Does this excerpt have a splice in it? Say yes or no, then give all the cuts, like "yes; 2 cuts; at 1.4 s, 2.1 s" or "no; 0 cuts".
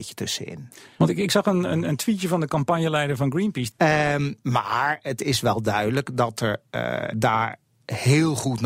yes; 2 cuts; at 3.7 s, 7.1 s